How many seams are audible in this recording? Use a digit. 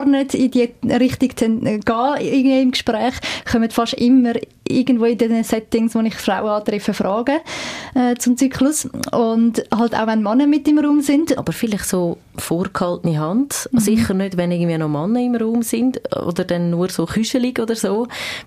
1